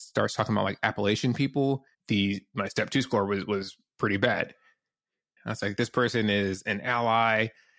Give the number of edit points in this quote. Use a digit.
2